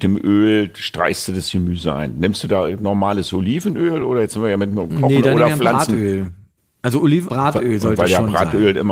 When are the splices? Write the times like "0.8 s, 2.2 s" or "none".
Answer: 7.3 s